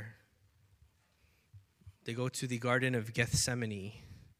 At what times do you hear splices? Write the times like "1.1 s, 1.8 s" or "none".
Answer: 1.9 s